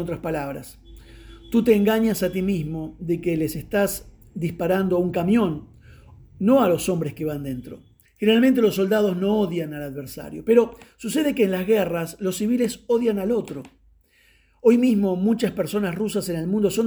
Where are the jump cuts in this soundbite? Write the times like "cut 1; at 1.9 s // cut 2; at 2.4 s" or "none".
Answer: cut 1; at 8.1 s